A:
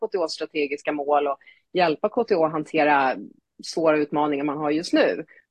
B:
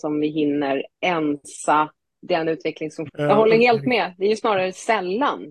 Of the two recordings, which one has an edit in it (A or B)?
B